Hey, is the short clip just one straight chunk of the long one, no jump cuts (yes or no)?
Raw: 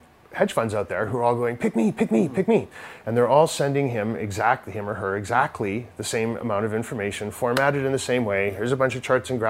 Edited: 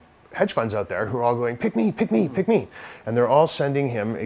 yes